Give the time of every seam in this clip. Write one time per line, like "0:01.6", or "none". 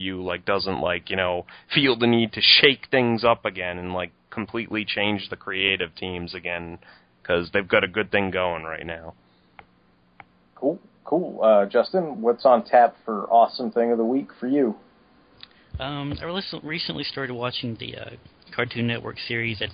none